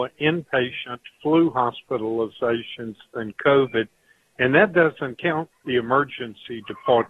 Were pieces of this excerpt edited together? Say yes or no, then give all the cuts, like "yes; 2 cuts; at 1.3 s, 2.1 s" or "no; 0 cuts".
no; 0 cuts